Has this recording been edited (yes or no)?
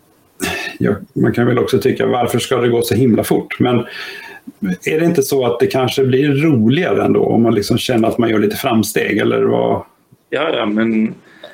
no